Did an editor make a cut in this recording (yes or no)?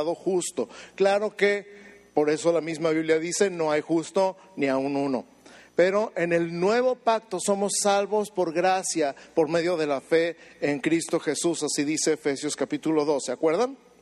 no